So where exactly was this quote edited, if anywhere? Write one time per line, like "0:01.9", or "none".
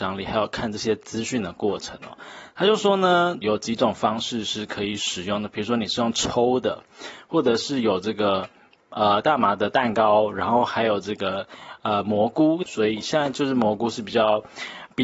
0:03.4
0:12.7